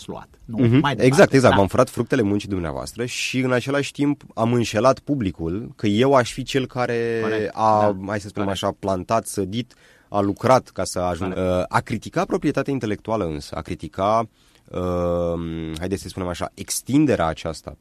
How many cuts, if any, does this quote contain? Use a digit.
1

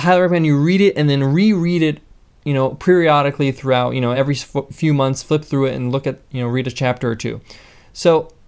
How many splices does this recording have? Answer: 0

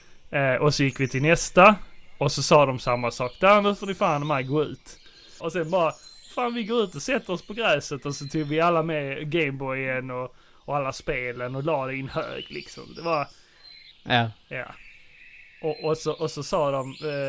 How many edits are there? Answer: 2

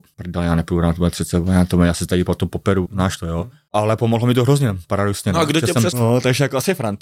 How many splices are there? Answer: 2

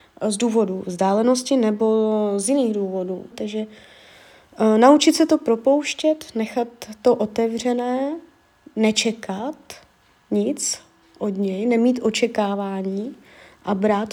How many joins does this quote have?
1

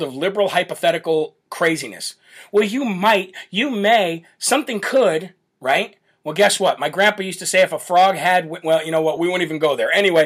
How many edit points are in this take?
0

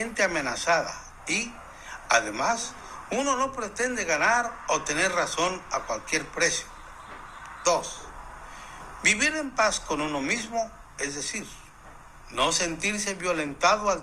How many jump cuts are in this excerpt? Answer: 0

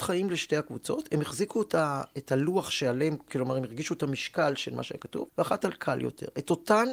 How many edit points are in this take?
2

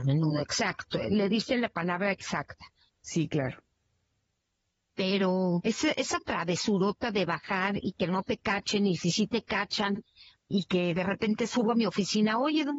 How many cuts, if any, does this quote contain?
2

